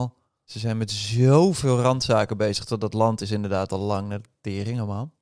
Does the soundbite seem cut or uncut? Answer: uncut